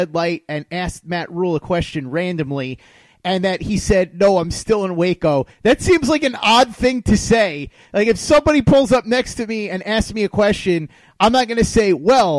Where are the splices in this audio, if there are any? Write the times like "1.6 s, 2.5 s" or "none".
none